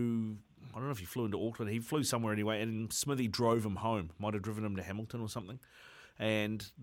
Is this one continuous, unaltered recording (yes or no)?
yes